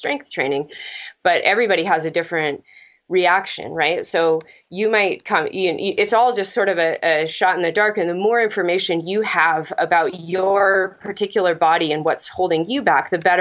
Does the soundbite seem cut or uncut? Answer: uncut